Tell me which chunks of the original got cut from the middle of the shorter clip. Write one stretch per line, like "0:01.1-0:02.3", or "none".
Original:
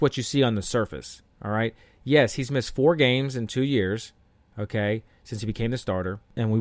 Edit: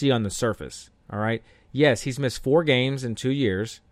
none